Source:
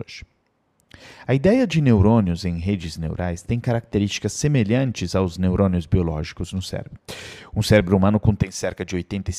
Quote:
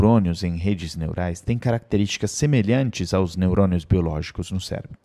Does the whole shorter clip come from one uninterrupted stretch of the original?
yes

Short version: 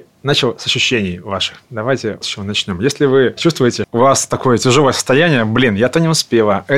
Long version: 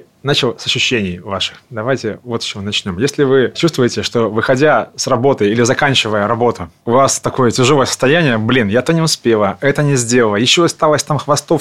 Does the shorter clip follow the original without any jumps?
no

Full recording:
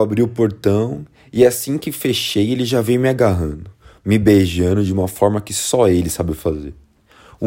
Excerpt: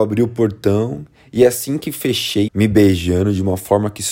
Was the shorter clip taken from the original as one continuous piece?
no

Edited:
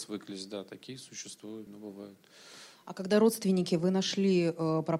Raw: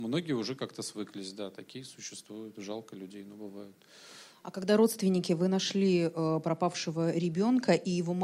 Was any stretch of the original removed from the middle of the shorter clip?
yes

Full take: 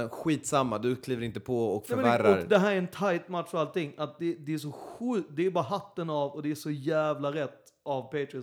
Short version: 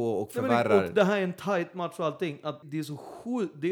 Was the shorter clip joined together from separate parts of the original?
yes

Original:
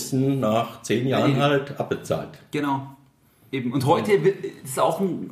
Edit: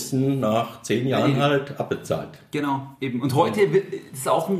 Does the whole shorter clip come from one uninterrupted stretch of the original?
no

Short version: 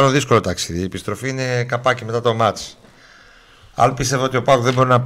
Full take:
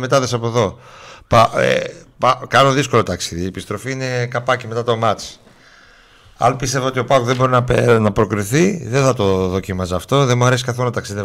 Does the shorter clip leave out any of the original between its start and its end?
no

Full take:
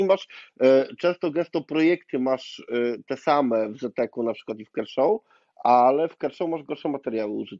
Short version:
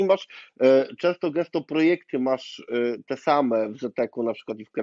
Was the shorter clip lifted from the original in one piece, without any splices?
yes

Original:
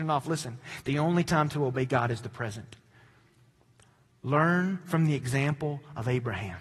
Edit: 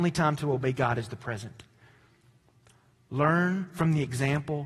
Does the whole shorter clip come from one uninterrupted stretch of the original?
yes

